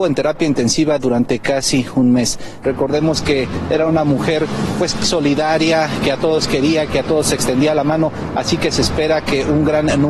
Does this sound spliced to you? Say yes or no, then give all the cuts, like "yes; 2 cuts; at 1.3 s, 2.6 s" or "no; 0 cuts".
yes; 1 cut; at 2.6 s